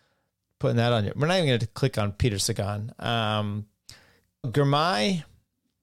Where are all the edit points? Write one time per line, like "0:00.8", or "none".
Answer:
0:04.4